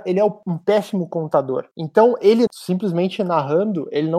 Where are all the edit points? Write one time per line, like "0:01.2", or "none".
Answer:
0:02.5

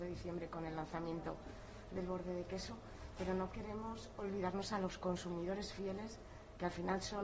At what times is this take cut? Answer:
none

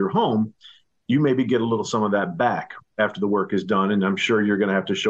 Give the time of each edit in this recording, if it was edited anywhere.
none

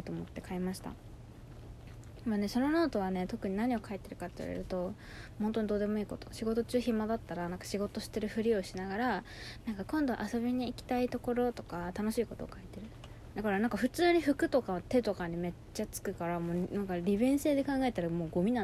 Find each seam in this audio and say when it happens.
0:13.3

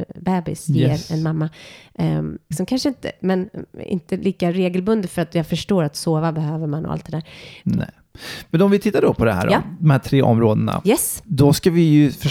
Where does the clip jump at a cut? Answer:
0:02.5
0:07.6

